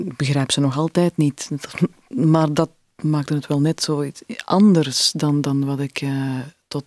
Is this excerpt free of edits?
yes; 0 cuts

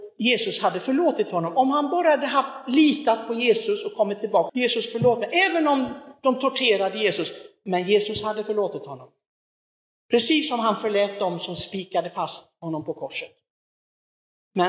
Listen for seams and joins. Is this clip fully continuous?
no; 2 cuts; at 4.5 s, 10.0 s

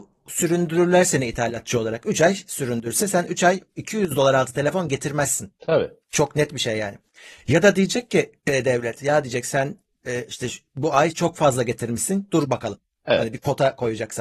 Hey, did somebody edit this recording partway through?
no; 0 cuts

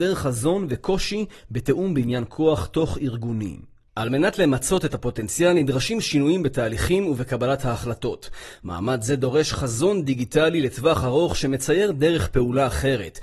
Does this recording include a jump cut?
no; 0 cuts

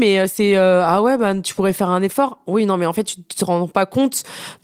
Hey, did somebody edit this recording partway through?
no; 0 cuts

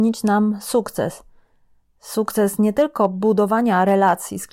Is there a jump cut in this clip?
no; 0 cuts

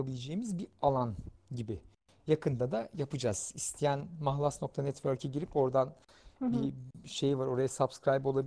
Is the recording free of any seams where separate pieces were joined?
yes; 0 cuts

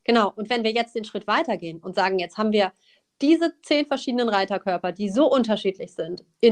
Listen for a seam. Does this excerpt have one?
no; 0 cuts

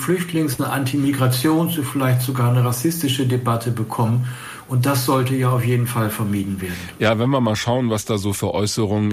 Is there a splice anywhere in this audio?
no; 0 cuts

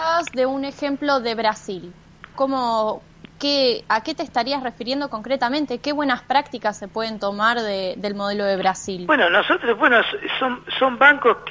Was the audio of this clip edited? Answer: yes; 1 cut; at 2.3 s

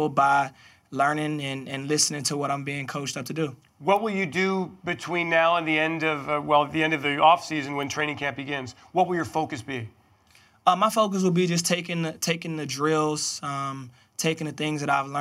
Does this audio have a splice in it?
no; 0 cuts

